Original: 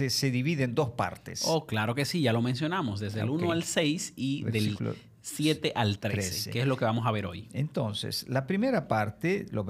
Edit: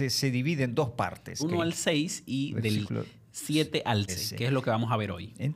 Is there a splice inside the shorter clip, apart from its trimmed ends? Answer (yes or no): yes